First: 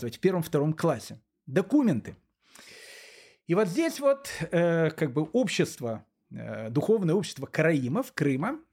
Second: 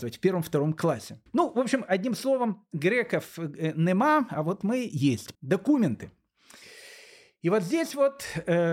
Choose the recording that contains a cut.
second; 2 cuts; at 1.3 s, 5.4 s

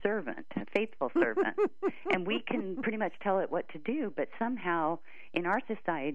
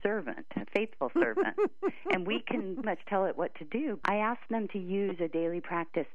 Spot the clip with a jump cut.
second; 2 cuts; at 2.8 s, 4.0 s

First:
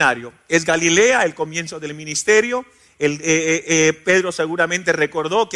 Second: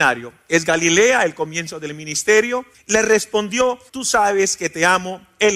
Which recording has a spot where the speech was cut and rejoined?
second; 2 cuts; at 2.7 s, 3.9 s

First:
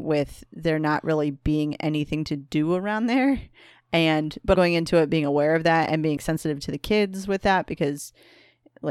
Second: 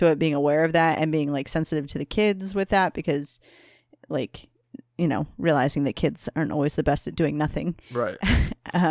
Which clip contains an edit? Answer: first; 2 cuts; at 4.5 s, 6.2 s

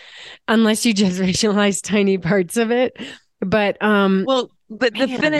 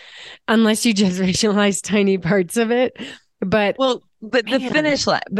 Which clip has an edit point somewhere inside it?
second; 1 cut; at 3.8 s

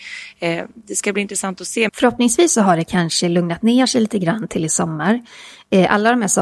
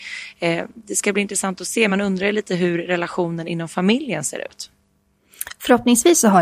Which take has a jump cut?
first; 1 cut; at 1.9 s

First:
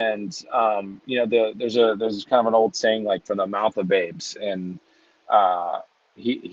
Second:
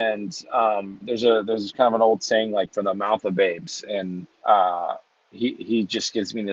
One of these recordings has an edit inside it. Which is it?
second; 2 cuts; at 1.0 s, 4.3 s

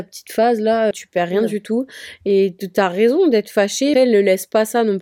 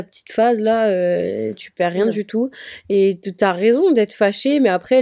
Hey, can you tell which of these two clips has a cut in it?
first; 2 cuts; at 0.9 s, 3.9 s

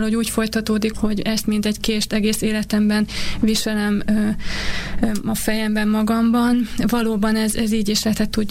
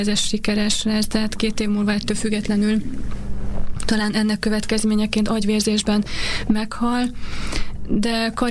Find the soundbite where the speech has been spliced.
first; 1 cut; at 0.9 s

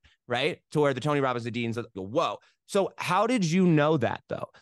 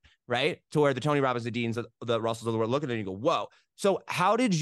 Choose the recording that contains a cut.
first; 1 cut; at 1.9 s

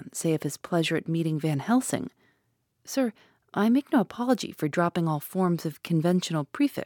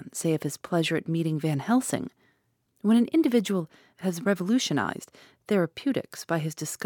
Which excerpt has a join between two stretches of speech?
second; 1 cut; at 2.7 s

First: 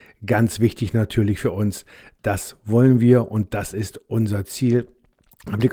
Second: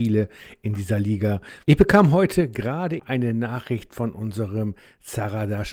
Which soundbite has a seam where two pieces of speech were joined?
second; 2 cuts; at 1.6 s, 3.0 s

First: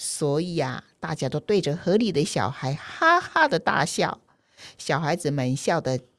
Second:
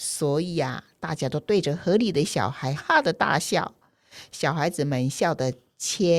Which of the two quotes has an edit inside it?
second; 1 cut; at 2.8 s

